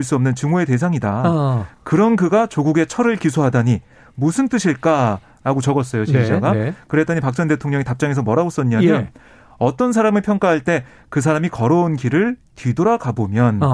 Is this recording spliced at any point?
no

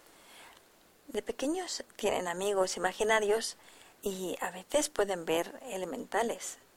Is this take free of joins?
no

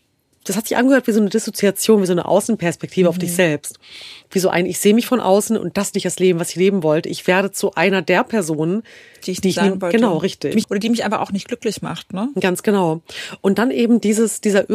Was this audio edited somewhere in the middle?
yes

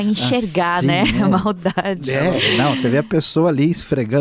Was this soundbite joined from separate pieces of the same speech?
no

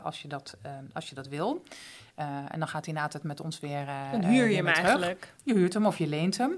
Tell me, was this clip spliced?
no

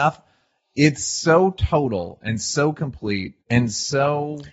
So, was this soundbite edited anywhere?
yes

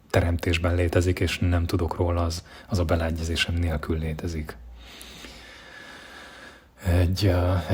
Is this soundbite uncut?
yes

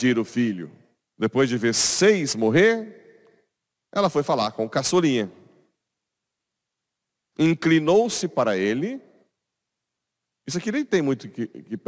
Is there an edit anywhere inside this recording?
yes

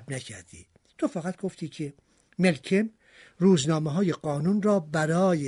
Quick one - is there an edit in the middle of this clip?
no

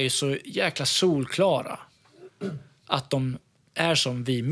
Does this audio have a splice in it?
no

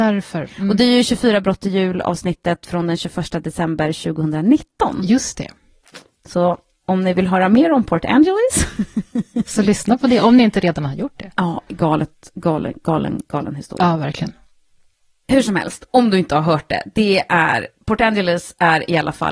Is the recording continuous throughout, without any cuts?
yes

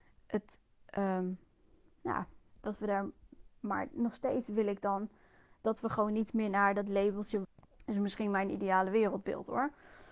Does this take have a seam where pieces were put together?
yes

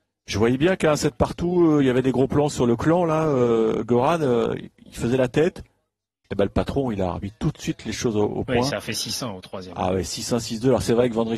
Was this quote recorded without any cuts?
yes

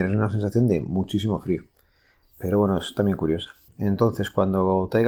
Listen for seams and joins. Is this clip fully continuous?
no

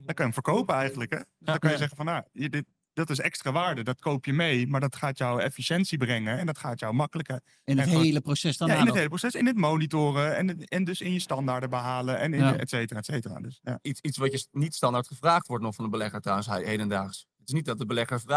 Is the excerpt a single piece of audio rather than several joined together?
yes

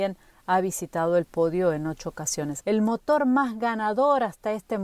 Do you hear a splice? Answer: yes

